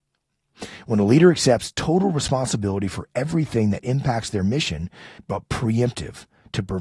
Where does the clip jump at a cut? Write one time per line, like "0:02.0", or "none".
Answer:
0:05.2